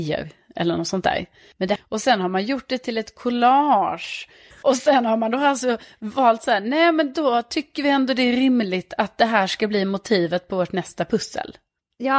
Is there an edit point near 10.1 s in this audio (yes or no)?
no